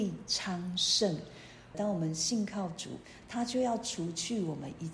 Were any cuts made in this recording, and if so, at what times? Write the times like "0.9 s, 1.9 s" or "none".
1.7 s, 3.2 s